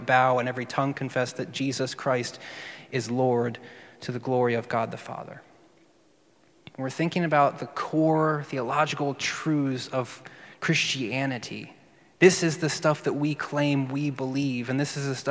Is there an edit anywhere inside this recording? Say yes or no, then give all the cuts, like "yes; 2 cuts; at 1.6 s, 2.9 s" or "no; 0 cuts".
yes; 1 cut; at 6.7 s